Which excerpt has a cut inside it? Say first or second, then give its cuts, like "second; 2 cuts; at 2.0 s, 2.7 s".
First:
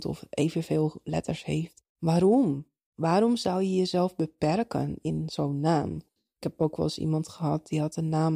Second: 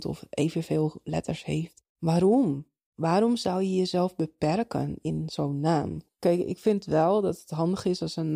first; 1 cut; at 6.2 s